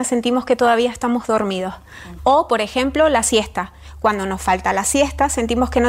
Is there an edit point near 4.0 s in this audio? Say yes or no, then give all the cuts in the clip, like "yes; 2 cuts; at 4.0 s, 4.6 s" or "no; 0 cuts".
no; 1 cut; at 2.2 s